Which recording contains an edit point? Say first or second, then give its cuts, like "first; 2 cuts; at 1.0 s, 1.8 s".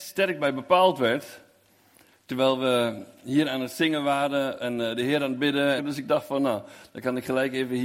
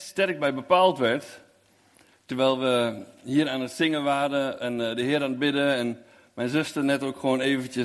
first; 1 cut; at 5.8 s